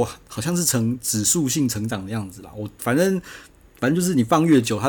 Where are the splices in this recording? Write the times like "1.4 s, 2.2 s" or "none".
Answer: none